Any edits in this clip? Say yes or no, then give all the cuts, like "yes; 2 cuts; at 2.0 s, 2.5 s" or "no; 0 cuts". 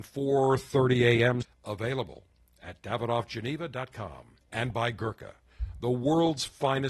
yes; 2 cuts; at 1.4 s, 4.4 s